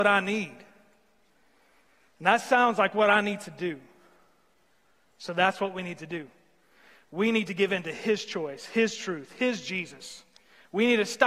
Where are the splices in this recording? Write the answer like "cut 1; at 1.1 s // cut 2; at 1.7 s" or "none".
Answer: none

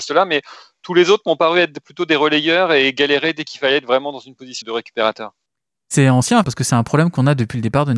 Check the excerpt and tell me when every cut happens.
cut 1; at 4.6 s // cut 2; at 6.4 s

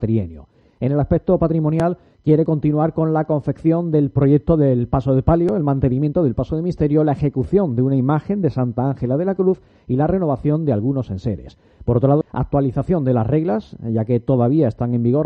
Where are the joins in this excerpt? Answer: cut 1; at 12.2 s

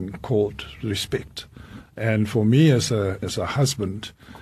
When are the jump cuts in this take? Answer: cut 1; at 1.9 s // cut 2; at 3.2 s

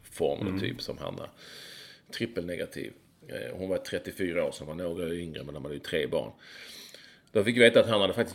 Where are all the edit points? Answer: none

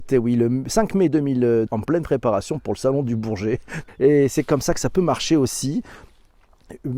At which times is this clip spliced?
cut 1; at 1.7 s // cut 2; at 3.9 s

